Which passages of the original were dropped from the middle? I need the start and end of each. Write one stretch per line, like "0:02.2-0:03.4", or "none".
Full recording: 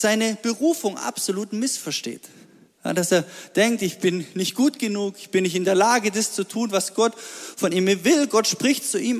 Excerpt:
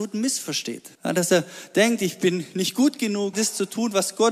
0:02.3-0:02.7
0:05.1-0:06.1